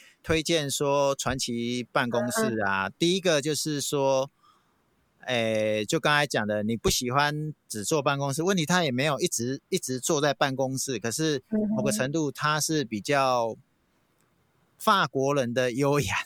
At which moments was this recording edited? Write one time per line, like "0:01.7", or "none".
none

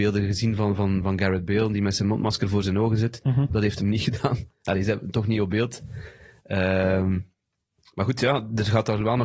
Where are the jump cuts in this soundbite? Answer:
none

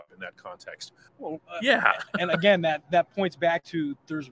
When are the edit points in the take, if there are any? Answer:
0:01.1

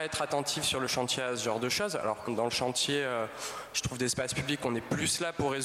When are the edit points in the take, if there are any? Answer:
0:02.3

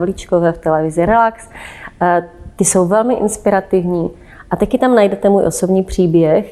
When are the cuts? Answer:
none

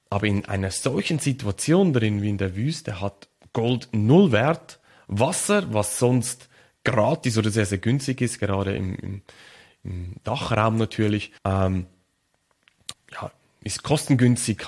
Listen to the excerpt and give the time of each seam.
0:11.4
0:12.9

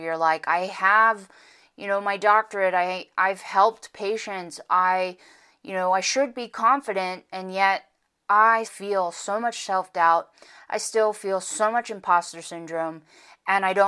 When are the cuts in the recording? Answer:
0:08.6

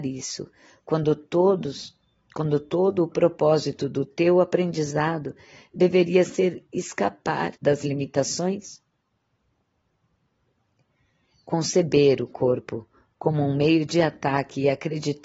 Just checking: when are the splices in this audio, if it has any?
0:07.6

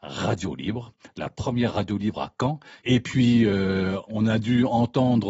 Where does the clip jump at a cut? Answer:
0:02.8
0:04.0

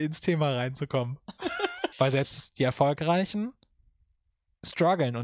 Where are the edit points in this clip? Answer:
0:01.9

